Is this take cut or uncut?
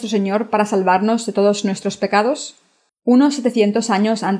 cut